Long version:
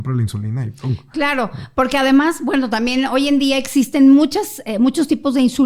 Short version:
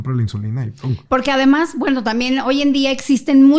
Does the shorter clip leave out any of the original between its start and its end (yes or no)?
yes